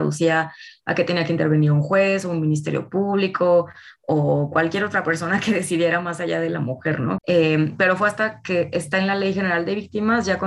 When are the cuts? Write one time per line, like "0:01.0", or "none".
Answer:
0:07.2